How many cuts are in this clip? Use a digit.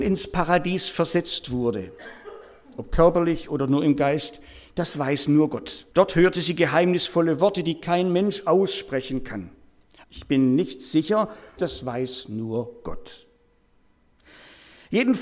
3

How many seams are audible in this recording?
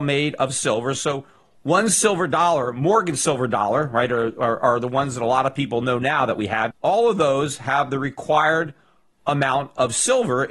1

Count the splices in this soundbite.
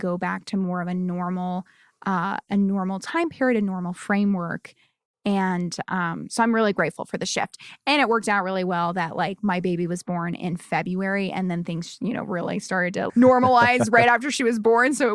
1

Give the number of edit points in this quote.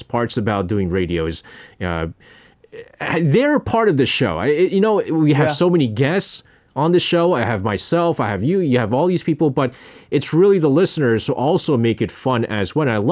0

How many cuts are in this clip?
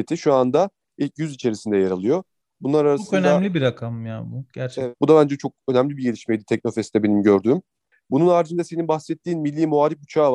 1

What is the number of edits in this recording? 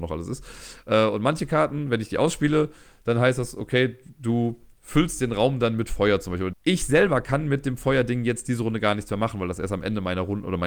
1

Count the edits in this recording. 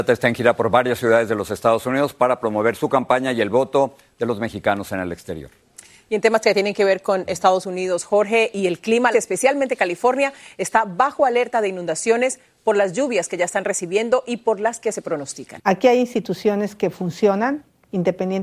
2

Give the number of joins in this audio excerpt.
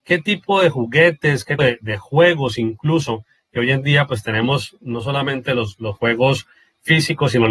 1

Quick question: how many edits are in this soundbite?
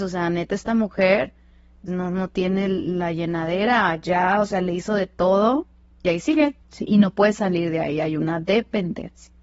2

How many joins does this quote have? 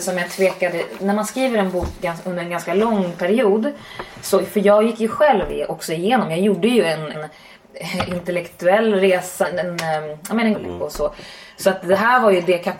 3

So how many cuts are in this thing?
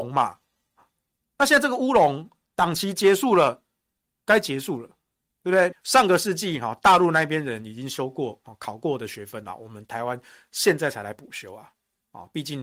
1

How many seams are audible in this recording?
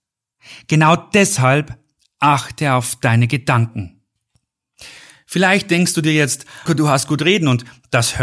1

